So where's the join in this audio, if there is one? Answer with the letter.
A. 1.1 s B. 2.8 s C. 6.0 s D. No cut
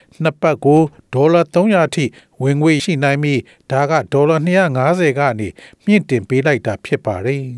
B